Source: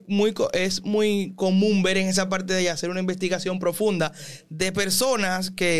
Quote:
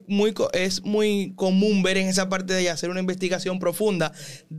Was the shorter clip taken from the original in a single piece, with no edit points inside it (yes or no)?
yes